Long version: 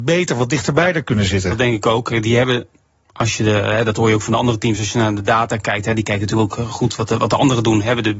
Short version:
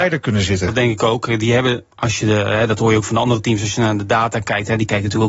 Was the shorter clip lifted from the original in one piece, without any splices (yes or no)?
no